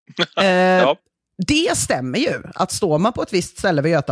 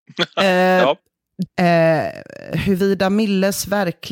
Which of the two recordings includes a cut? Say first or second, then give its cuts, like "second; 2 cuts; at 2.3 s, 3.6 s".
second; 1 cut; at 1.5 s